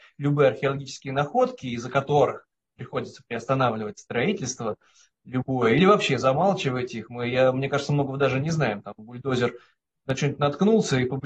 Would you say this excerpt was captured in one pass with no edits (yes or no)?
yes